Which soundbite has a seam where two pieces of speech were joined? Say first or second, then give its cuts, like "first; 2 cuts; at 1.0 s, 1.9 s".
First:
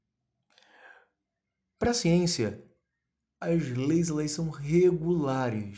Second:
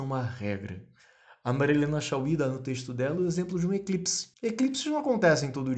second; 1 cut; at 4.3 s